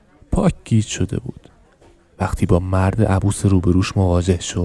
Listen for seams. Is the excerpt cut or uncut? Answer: uncut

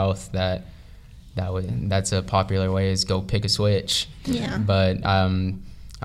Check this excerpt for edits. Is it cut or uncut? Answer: uncut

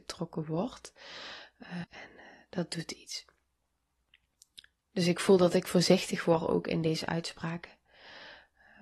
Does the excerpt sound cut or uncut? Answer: cut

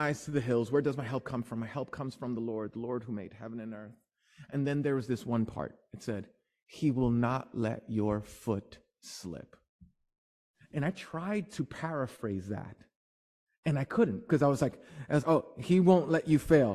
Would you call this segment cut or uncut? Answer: cut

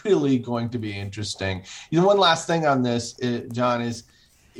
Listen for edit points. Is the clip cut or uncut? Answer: uncut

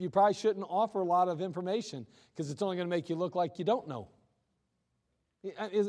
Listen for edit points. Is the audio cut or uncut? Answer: uncut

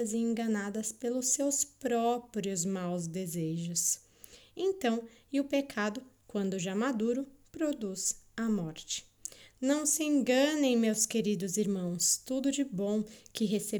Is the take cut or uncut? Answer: cut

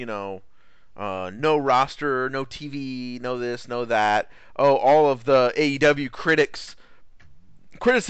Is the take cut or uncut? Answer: uncut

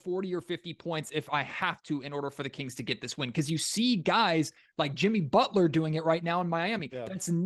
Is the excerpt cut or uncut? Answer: uncut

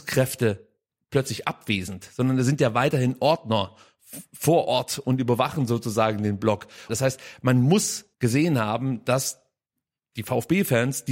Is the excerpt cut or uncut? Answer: cut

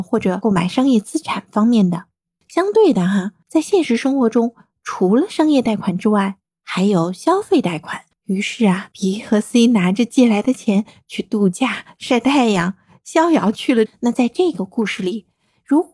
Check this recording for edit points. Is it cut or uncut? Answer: cut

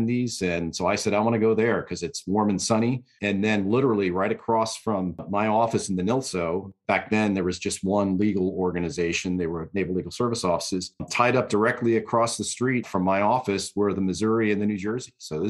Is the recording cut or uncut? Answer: cut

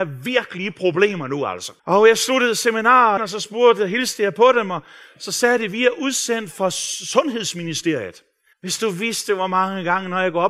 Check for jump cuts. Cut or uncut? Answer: cut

